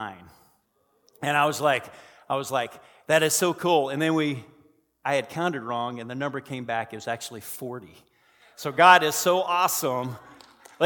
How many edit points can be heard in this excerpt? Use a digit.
0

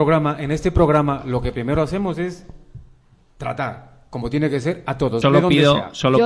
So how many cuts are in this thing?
1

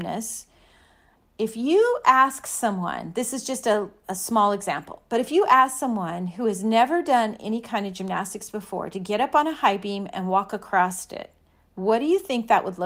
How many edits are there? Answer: 0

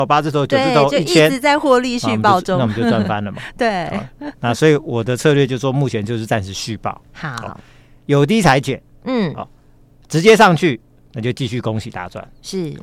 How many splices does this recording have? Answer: 0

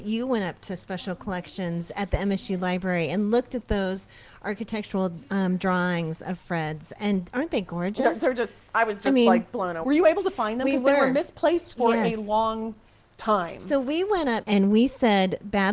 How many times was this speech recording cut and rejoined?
2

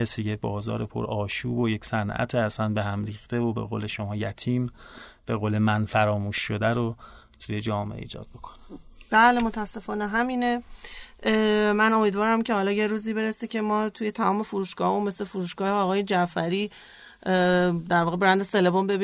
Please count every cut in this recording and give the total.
0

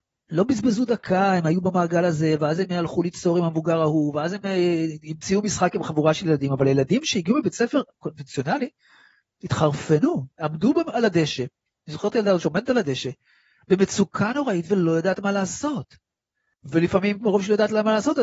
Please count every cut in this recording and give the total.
0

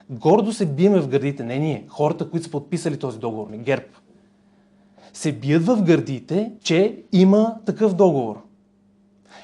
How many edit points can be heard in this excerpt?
2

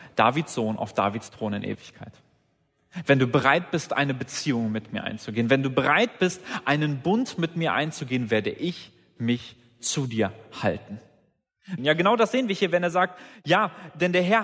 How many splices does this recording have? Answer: 1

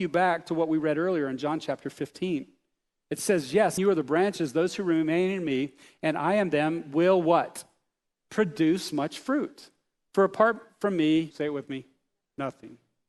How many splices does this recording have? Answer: 2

